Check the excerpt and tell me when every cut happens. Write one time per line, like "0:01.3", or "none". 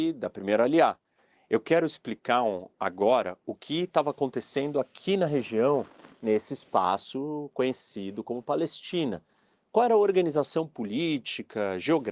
none